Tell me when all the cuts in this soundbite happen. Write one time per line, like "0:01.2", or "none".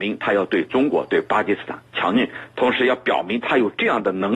none